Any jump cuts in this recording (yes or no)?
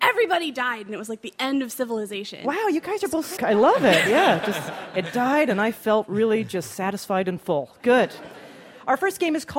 yes